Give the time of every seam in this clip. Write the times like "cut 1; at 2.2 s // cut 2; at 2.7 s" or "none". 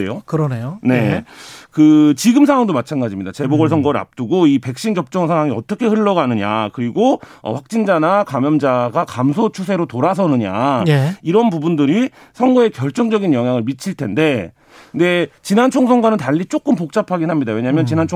none